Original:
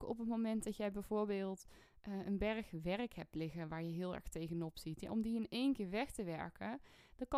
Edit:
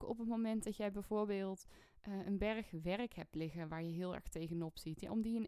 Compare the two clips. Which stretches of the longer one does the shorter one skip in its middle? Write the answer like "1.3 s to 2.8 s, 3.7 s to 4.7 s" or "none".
none